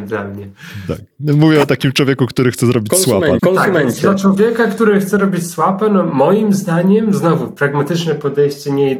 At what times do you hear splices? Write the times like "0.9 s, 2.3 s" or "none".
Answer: 3.4 s